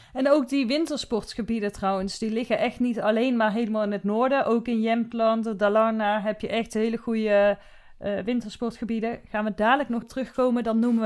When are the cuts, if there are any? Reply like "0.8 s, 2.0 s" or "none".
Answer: 10.0 s